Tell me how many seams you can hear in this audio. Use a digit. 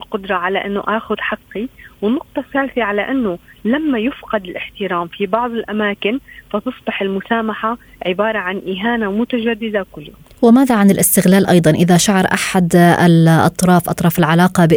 0